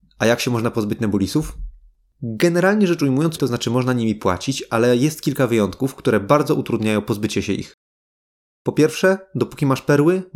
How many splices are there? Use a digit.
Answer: 1